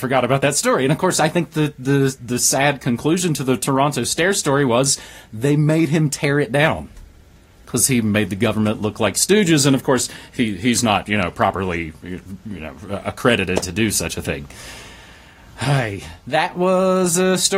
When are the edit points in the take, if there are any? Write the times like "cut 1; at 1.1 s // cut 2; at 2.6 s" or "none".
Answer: none